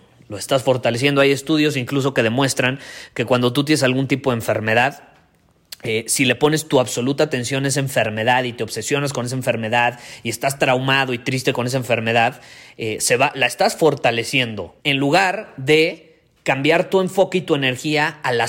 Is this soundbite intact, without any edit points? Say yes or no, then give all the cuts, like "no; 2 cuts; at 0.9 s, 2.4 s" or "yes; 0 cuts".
no; 1 cut; at 14.8 s